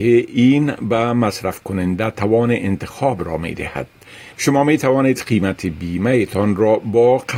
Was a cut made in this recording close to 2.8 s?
no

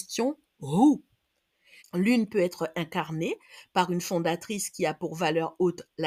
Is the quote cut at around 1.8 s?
yes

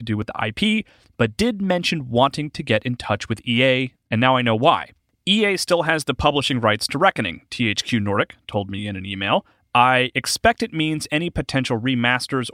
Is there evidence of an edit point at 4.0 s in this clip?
yes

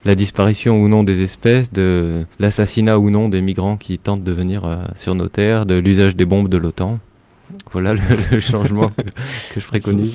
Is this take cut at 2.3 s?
yes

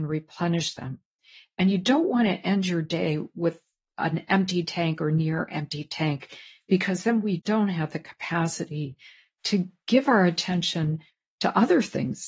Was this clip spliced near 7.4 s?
yes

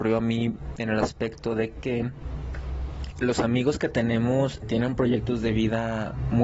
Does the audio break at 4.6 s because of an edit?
yes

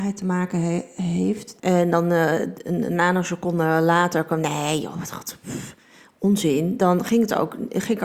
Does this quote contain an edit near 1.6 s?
yes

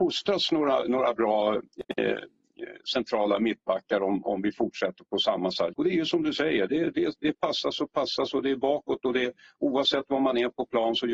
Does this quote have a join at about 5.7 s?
yes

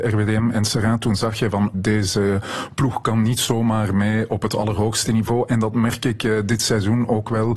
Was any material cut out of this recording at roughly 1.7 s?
yes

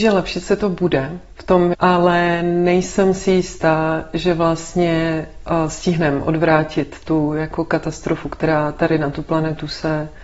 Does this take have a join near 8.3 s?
no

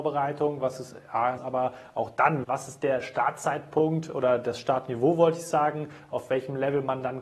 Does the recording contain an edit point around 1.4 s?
yes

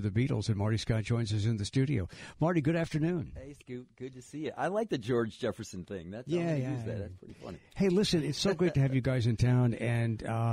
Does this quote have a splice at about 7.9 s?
no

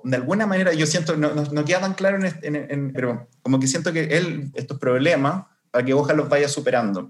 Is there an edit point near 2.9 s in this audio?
yes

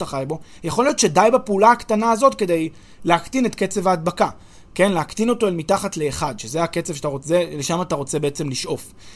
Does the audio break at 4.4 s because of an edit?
no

